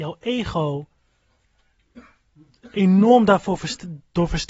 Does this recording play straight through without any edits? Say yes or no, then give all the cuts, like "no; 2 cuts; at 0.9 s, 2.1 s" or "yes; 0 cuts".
yes; 0 cuts